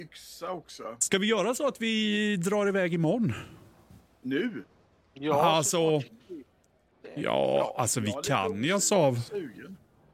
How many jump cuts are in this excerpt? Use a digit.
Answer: 0